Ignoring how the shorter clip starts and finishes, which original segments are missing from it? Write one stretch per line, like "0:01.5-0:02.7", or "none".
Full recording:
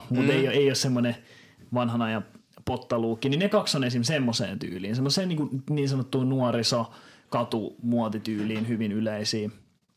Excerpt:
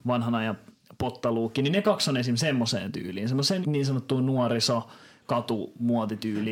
0:05.3-0:05.6